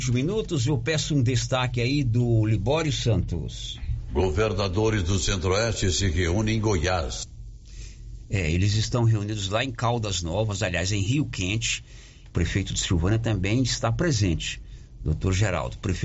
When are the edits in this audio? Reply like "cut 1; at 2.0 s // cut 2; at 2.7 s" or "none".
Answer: cut 1; at 12.3 s